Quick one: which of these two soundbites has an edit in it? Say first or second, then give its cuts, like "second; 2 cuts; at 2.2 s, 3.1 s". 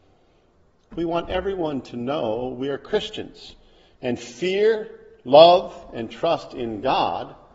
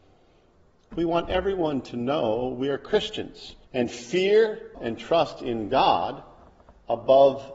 second; 2 cuts; at 3.6 s, 4.7 s